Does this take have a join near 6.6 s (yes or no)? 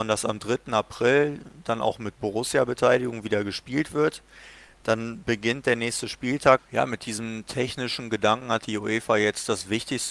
yes